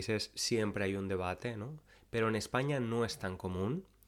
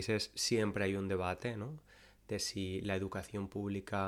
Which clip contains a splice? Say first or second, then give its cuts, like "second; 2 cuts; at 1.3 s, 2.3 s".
first; 1 cut; at 1.9 s